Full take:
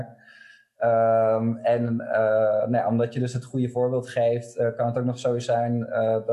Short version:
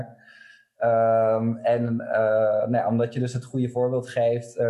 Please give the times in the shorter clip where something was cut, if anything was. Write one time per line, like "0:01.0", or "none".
none